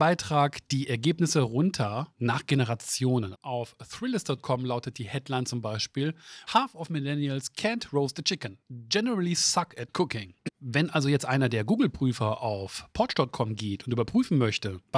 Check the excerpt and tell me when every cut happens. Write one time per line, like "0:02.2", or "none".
0:03.3
0:06.5
0:10.5